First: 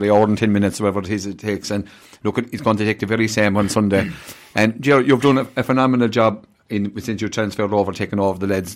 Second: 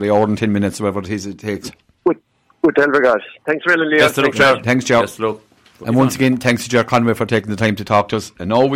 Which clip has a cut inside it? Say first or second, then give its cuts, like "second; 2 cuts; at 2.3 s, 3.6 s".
second; 1 cut; at 1.6 s